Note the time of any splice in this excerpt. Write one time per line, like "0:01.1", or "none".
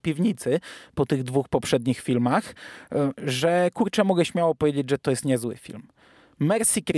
0:03.1